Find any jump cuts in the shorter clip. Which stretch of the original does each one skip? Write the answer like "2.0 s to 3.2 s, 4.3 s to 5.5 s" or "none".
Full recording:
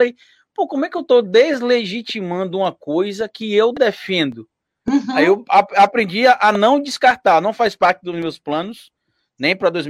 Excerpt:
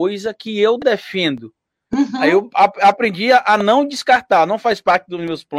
none